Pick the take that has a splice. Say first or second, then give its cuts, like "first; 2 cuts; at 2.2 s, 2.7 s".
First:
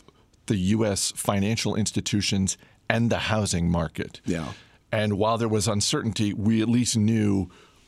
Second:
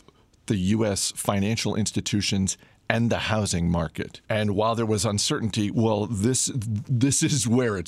second; 2 cuts; at 4.2 s, 5.7 s